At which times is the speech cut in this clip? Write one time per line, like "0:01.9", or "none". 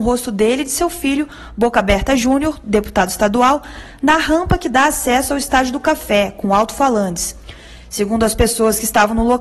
none

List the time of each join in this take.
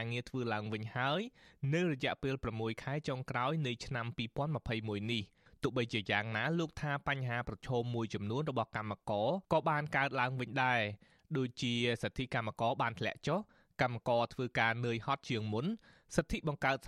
0:09.4

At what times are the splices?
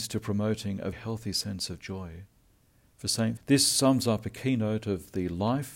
0:00.9
0:03.4

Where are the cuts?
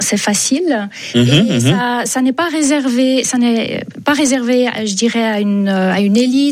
none

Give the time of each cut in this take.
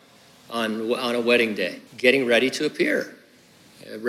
0:01.9

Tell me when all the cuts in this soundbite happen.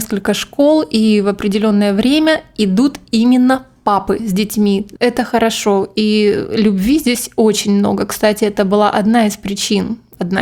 0:05.0

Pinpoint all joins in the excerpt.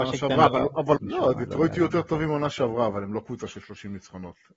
0:01.0

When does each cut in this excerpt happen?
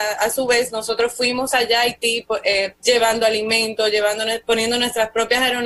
0:02.7

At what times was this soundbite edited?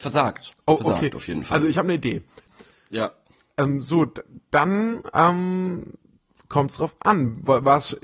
0:02.5

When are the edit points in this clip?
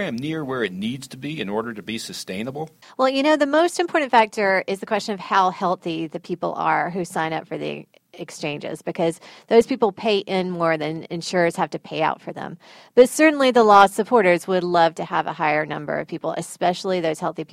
none

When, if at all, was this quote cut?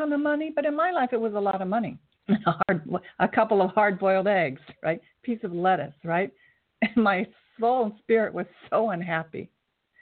0:02.2

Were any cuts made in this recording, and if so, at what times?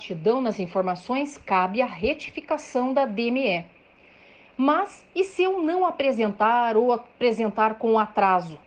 none

